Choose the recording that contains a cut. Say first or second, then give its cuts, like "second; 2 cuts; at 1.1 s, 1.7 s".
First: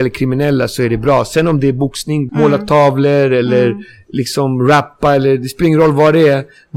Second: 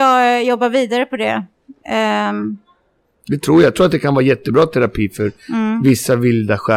first; 1 cut; at 2.3 s